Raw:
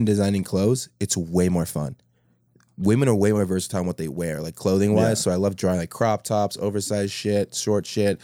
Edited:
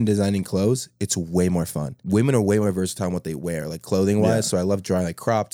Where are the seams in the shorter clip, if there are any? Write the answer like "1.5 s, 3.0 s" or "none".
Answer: 2.0 s